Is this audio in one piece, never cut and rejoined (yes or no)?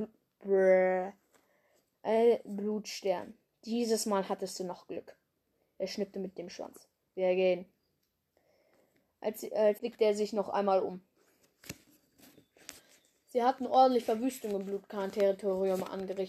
no